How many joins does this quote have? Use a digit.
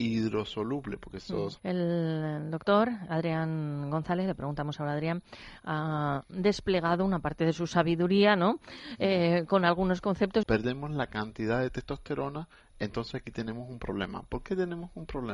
2